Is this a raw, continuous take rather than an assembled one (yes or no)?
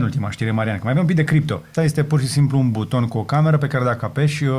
no